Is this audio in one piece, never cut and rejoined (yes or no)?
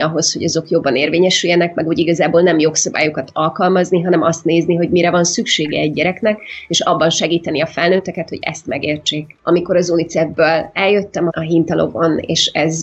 no